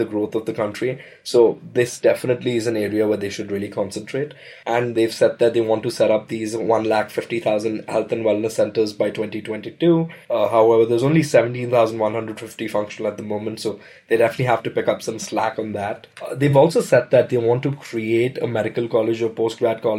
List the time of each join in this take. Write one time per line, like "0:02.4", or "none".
none

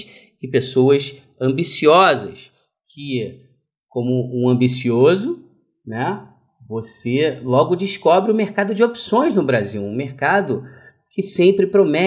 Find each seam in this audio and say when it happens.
none

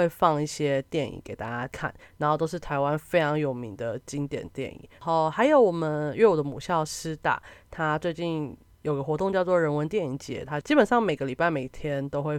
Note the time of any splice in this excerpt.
0:05.0

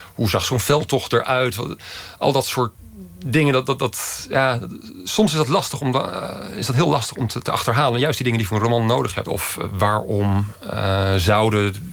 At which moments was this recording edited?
0:09.3

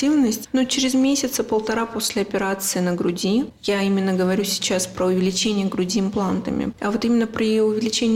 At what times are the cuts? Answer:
0:06.7

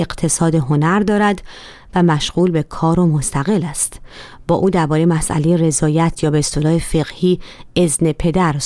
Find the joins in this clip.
none

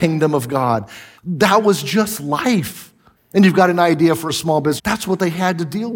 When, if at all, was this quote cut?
0:01.1
0:03.2
0:04.8

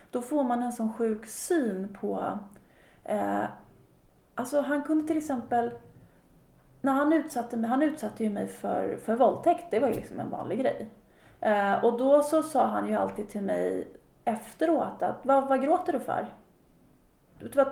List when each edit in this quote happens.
none

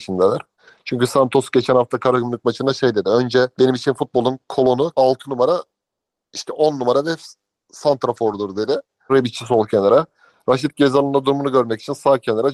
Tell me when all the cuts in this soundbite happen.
0:03.5
0:04.9
0:09.1

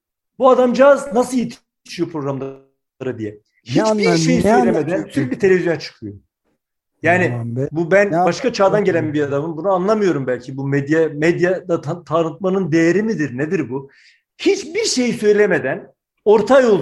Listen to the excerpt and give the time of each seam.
none

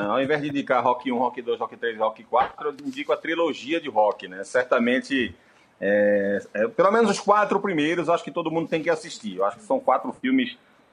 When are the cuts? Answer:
none

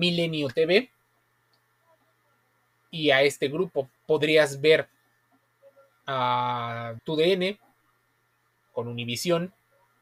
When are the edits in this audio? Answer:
0:04.0
0:07.0

